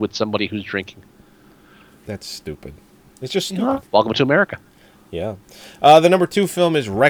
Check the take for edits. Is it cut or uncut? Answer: cut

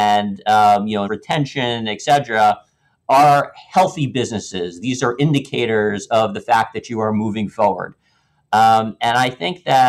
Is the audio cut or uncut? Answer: cut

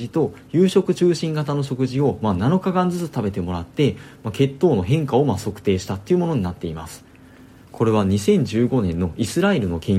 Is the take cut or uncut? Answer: cut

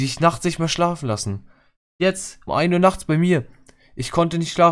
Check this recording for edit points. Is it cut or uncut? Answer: cut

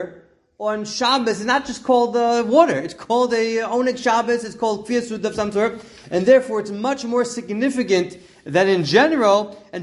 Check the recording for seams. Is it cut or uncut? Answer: uncut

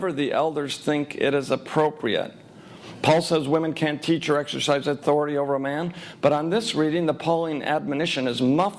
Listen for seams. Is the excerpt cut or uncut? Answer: uncut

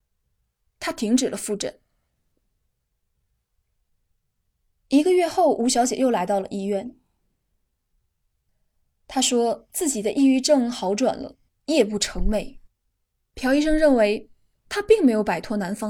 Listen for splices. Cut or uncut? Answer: cut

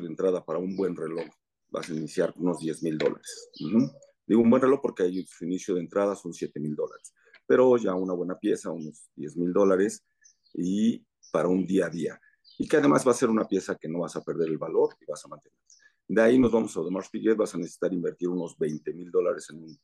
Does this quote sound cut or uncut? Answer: uncut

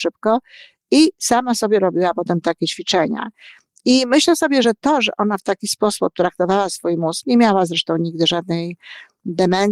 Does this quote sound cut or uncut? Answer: uncut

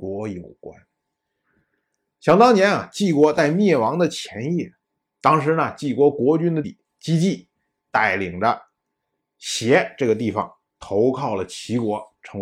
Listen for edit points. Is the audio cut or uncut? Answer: cut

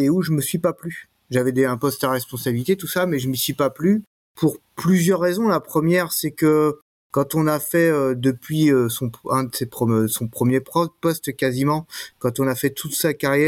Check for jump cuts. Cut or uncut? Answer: uncut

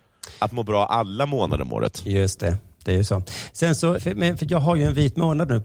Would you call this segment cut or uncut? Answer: cut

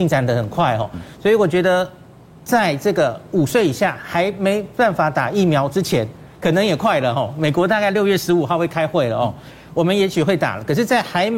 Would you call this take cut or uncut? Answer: uncut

